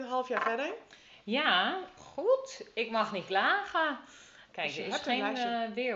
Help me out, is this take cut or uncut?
cut